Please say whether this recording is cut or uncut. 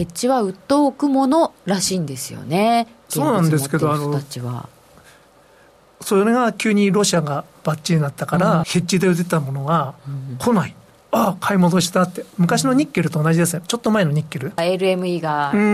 cut